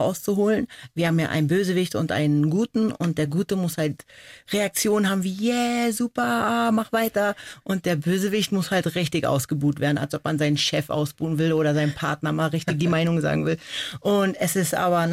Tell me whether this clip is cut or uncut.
uncut